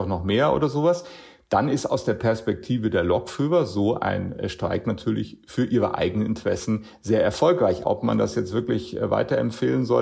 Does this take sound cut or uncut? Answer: uncut